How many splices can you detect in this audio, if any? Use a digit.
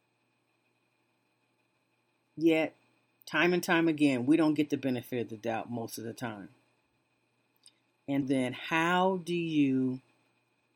1